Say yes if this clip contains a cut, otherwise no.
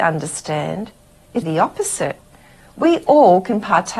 yes